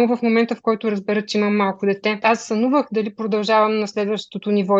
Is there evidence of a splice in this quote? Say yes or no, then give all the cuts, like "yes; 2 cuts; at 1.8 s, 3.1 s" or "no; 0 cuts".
yes; 1 cut; at 2.2 s